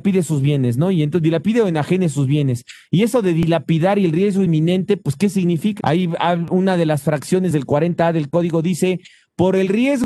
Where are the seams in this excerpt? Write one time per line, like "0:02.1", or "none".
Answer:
0:05.8